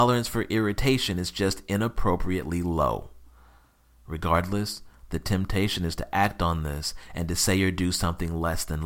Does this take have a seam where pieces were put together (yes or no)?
no